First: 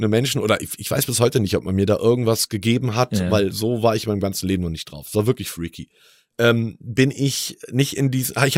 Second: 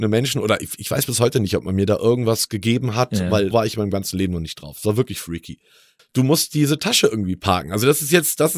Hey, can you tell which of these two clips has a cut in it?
second; 2 cuts; at 3.5 s, 6.0 s

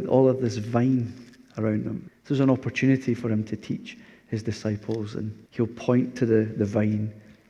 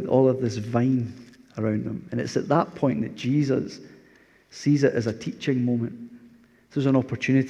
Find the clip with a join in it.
first; 2 cuts; at 2.1 s, 5.5 s

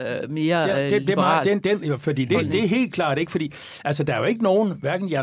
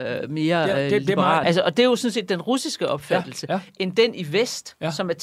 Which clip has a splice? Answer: second; 1 cut; at 1.4 s

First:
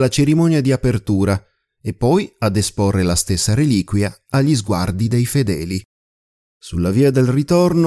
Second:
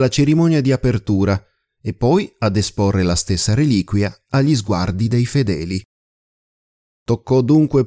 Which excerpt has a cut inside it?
first; 1 cut; at 6.5 s

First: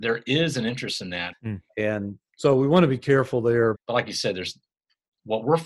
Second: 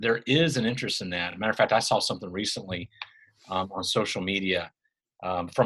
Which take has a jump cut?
first; 2 cuts; at 1.3 s, 3.7 s

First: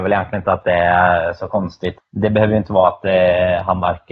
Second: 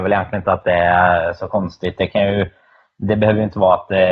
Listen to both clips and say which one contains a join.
first; 1 cut; at 2.0 s

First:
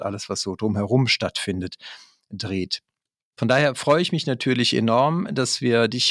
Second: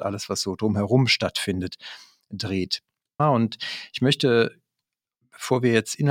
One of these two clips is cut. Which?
second; 1 cut; at 3.2 s

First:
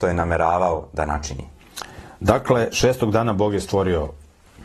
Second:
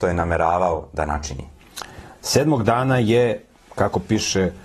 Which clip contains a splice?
second; 1 cut; at 2.1 s

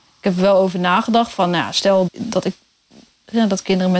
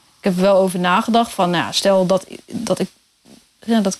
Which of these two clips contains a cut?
first; 1 cut; at 2.1 s

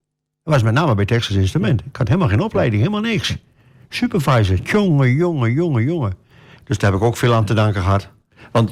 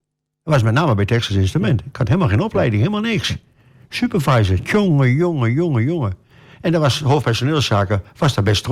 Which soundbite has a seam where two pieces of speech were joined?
first; 1 cut; at 6.6 s

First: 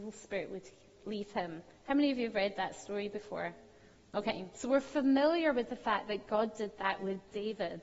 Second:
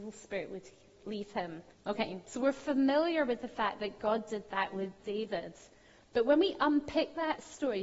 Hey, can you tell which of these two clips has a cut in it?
second; 1 cut; at 1.7 s

